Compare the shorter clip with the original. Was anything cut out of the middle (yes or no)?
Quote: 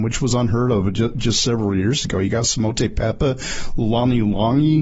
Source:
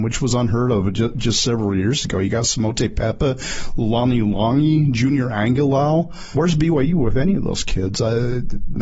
no